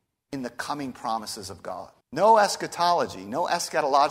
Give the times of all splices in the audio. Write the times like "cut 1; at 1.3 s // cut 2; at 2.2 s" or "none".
cut 1; at 2.0 s